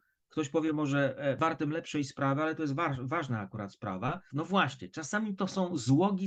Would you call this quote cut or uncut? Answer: cut